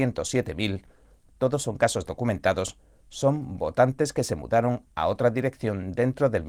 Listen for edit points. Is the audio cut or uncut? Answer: uncut